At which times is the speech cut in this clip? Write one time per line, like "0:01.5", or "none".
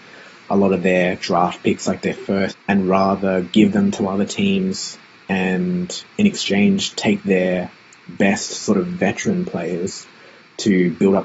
0:02.5